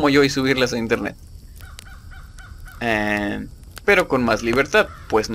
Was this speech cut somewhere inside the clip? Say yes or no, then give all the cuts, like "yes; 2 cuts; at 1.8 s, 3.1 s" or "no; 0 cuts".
yes; 2 cuts; at 2.8 s, 3.8 s